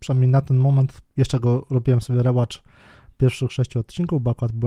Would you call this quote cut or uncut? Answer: cut